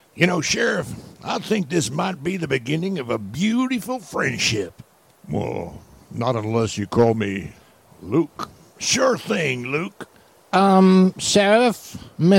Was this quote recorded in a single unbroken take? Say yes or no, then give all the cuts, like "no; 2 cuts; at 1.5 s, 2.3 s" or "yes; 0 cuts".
yes; 0 cuts